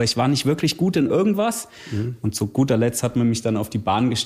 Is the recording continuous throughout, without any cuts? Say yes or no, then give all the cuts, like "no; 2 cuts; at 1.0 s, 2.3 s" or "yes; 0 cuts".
yes; 0 cuts